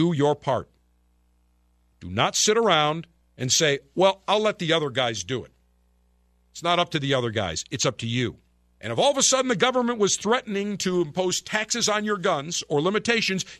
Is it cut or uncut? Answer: cut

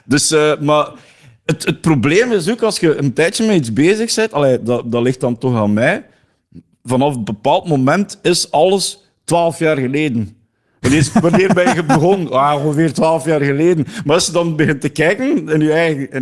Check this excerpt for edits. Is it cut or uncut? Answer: uncut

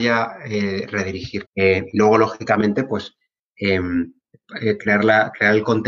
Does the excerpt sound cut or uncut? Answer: cut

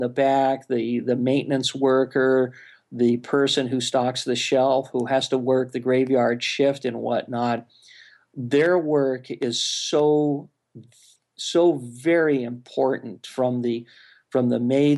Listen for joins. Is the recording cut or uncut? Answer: uncut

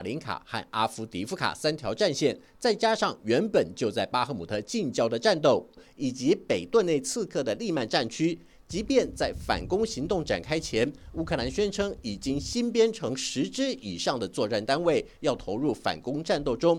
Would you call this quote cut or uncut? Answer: uncut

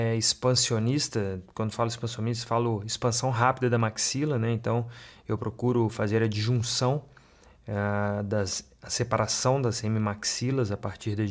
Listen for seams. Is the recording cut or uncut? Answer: uncut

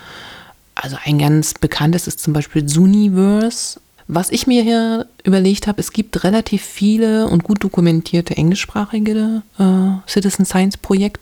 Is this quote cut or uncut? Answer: cut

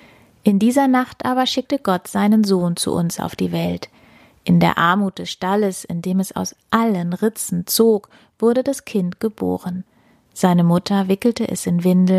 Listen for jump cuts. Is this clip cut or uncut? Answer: uncut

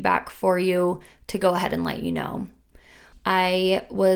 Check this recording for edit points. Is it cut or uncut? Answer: cut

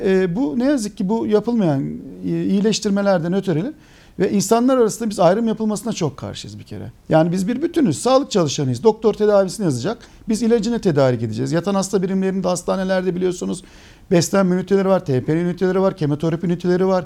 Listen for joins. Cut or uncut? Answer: cut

